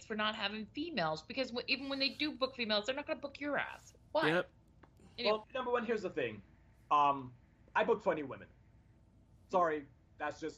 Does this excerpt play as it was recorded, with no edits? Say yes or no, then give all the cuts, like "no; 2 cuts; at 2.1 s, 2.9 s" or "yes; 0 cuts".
no; 1 cut; at 5.4 s